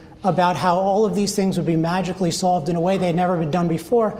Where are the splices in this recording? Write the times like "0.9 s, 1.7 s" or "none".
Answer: none